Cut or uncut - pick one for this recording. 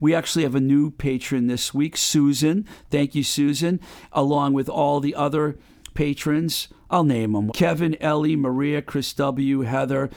cut